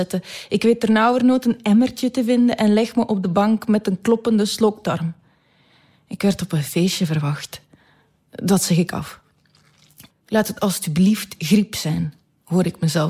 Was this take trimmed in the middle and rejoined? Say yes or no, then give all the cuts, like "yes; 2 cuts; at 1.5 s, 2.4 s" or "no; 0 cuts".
yes; 1 cut; at 10.1 s